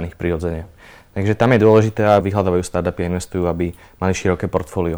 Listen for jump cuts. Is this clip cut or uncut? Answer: cut